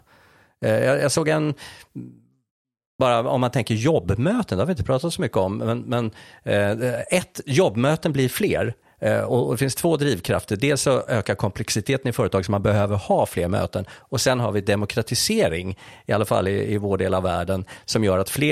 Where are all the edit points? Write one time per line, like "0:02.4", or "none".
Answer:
none